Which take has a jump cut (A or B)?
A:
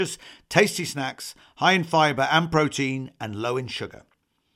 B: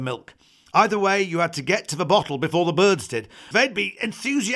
B